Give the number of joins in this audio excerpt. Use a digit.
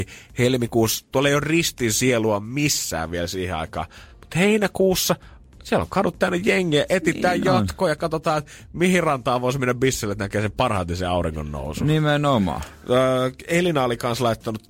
0